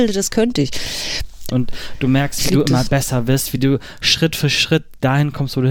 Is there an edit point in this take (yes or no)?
yes